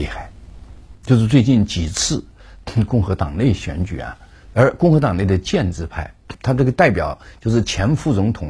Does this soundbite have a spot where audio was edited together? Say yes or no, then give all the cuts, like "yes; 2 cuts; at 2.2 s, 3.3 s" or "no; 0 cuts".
yes; 3 cuts; at 0.9 s, 4.5 s, 6.3 s